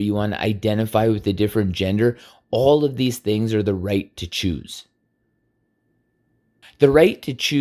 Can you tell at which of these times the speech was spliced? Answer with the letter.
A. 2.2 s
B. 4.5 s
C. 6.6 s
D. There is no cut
C